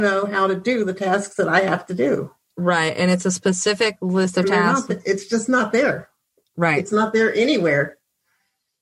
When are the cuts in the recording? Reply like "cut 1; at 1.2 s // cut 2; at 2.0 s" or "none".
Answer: none